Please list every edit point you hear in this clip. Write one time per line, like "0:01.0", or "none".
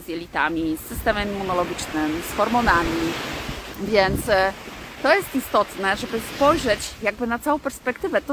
0:03.7